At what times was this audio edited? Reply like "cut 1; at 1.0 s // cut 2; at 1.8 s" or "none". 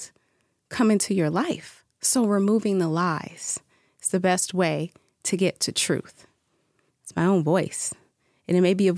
cut 1; at 6.9 s